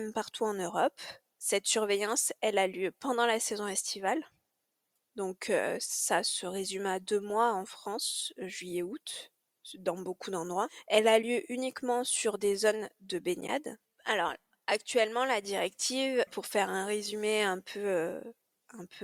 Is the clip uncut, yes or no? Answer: no